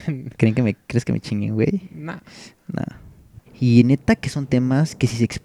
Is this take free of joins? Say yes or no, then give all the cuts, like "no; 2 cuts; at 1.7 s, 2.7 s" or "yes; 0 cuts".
no; 1 cut; at 3.5 s